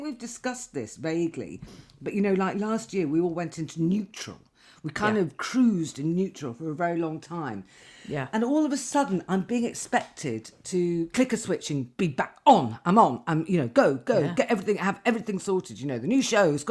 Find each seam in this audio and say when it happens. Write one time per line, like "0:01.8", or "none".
none